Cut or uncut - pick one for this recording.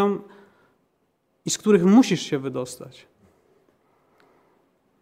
uncut